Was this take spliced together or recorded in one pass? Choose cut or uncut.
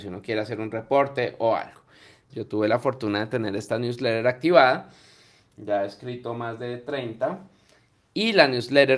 cut